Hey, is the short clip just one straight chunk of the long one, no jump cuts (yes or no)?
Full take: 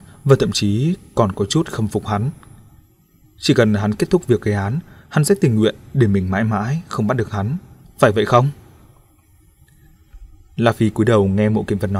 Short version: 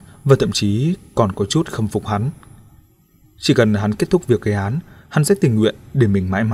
yes